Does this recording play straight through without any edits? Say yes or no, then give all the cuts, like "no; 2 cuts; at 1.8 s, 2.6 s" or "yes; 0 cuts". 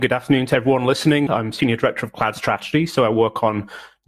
no; 1 cut; at 1.3 s